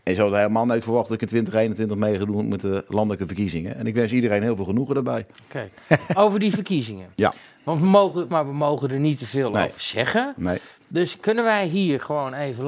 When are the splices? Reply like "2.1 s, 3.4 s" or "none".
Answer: 8.3 s